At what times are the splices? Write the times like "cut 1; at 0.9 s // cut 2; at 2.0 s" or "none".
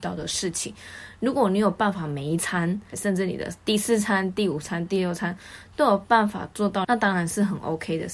cut 1; at 2.9 s // cut 2; at 6.8 s